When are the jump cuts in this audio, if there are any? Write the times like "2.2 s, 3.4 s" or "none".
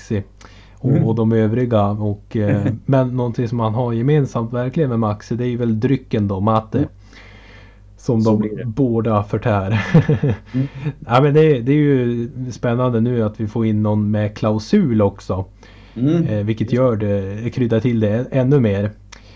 none